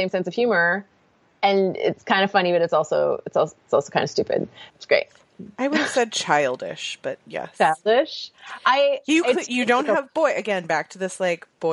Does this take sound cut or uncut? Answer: cut